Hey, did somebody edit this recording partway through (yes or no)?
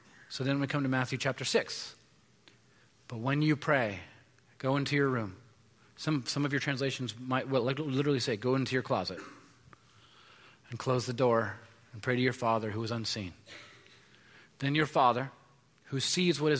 no